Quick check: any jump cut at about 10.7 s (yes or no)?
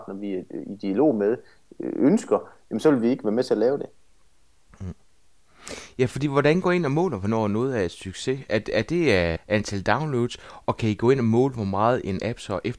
no